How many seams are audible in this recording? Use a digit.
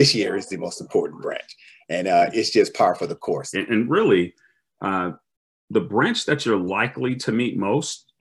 2